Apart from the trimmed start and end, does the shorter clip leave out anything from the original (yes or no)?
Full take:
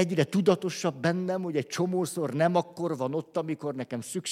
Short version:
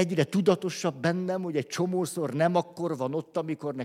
no